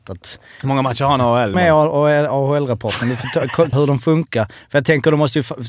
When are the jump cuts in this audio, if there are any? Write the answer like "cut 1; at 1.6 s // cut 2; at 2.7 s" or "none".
cut 1; at 1.5 s // cut 2; at 3.7 s